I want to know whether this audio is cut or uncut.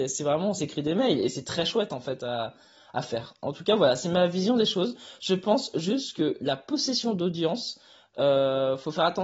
uncut